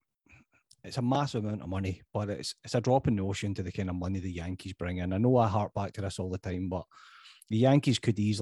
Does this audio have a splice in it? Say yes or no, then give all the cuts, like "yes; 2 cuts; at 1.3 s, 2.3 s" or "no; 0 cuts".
no; 0 cuts